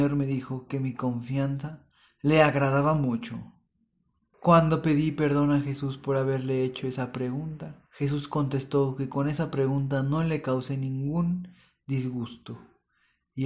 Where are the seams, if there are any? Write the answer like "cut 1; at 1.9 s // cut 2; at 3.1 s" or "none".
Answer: cut 1; at 4.3 s // cut 2; at 7.9 s